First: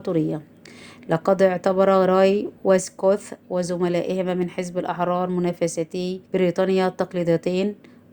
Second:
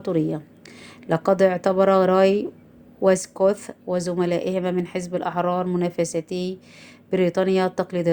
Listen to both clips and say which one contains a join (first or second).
first